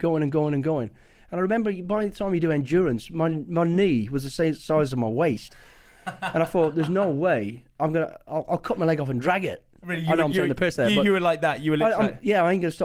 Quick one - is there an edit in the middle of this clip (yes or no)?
no